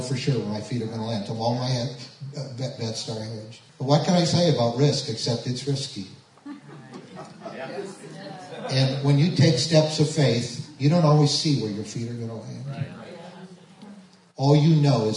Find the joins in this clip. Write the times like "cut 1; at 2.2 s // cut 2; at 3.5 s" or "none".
cut 1; at 3.7 s